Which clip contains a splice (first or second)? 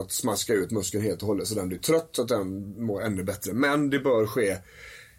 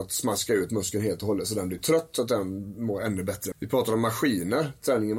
second